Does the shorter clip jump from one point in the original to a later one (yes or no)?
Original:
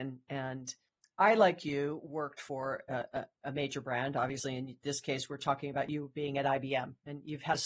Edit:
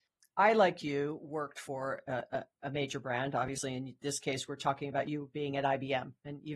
no